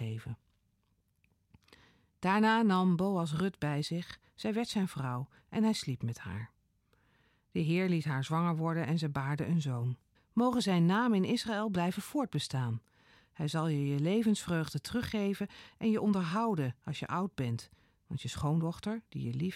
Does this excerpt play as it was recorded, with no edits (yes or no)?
no